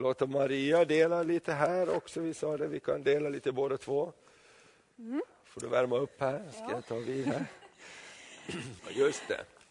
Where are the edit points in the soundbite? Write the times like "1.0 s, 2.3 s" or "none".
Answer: 8.8 s